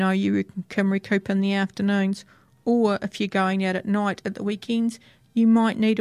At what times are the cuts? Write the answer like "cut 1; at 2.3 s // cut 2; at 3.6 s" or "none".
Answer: none